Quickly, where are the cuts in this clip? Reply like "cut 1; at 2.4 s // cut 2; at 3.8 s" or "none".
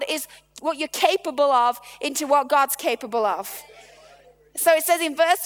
none

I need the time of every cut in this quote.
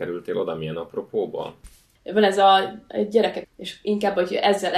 cut 1; at 2.0 s // cut 2; at 3.4 s

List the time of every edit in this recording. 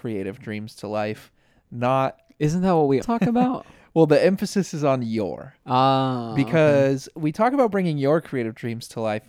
cut 1; at 3.0 s

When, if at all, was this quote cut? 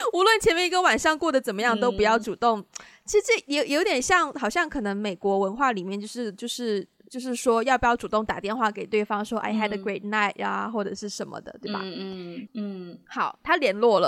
cut 1; at 12.5 s

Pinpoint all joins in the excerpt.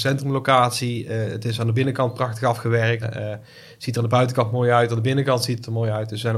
cut 1; at 3.0 s

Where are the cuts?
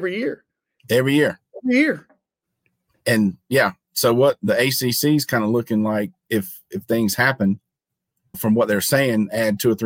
cut 1; at 8.3 s

